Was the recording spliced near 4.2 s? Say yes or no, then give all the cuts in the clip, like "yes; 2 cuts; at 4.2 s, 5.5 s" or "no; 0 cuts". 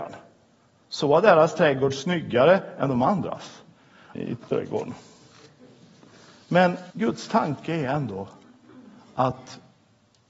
yes; 2 cuts; at 4.2 s, 6.9 s